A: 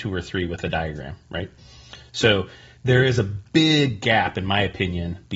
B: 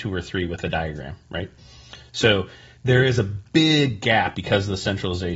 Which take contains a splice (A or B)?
B